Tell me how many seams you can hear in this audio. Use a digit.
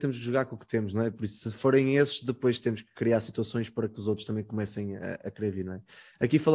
0